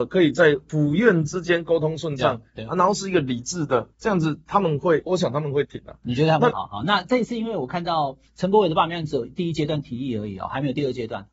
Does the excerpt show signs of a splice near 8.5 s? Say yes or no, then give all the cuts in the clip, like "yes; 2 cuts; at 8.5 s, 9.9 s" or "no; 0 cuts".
no; 3 cuts; at 3.9 s, 5.1 s, 6.5 s